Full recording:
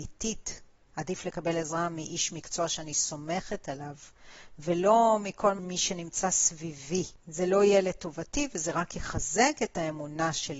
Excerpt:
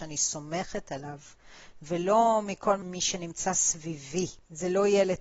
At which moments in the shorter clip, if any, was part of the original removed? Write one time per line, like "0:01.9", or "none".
none